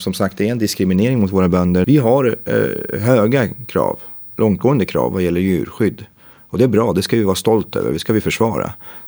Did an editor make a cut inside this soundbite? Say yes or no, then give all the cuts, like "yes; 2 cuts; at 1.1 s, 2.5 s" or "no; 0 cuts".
yes; 1 cut; at 1.8 s